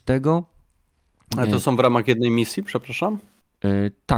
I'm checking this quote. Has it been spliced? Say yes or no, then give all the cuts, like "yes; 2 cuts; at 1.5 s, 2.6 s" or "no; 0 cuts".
no; 0 cuts